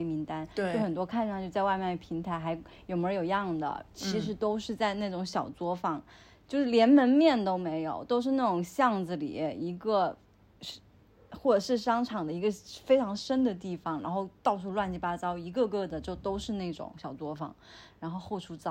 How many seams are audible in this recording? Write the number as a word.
zero